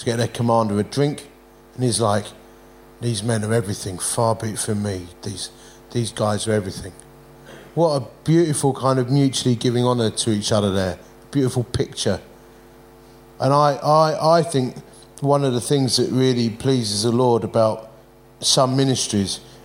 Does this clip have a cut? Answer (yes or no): no